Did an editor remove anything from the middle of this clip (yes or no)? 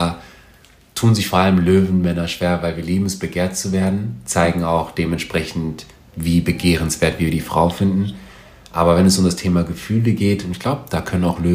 no